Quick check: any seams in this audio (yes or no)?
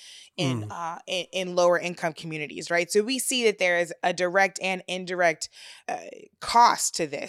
yes